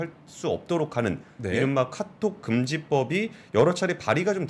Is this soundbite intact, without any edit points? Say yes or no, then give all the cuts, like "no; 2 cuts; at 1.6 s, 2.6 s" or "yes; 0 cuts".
yes; 0 cuts